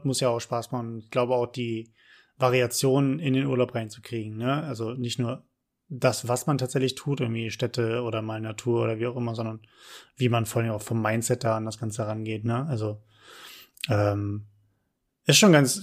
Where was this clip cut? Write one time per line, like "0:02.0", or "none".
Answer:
none